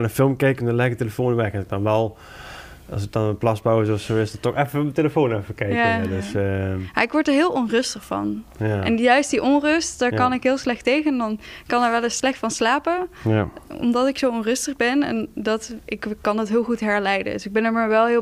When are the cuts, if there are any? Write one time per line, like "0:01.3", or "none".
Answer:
none